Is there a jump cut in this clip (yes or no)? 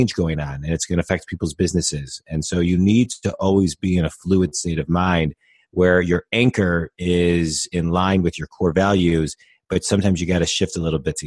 no